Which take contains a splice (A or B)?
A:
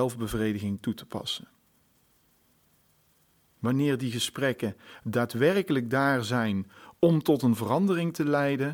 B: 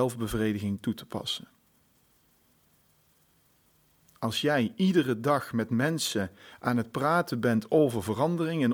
A